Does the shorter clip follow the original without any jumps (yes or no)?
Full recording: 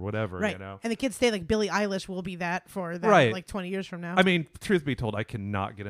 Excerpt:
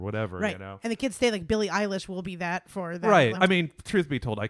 no